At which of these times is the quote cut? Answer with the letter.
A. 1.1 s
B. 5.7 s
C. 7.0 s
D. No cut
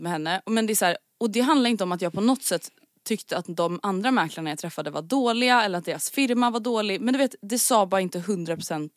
D